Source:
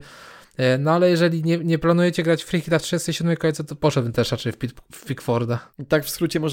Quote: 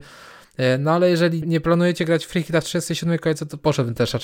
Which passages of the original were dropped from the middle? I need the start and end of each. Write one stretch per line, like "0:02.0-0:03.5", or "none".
0:01.4-0:01.6